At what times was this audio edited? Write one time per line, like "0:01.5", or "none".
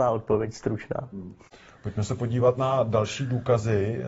none